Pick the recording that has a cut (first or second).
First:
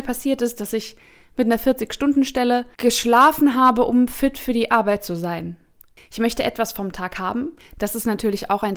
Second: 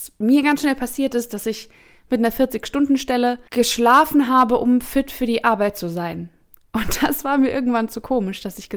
first